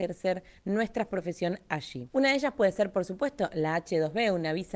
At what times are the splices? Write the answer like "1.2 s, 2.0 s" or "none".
none